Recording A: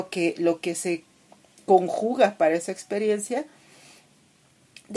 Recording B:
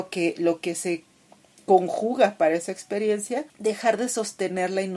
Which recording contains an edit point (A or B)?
B